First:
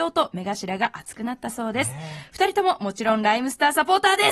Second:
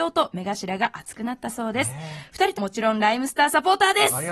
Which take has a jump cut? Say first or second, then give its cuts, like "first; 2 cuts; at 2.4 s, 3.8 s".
second; 1 cut; at 2.5 s